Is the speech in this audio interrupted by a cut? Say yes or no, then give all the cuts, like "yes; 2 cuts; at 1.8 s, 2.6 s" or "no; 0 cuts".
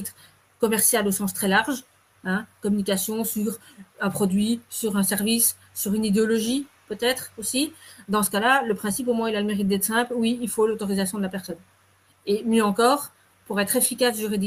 no; 0 cuts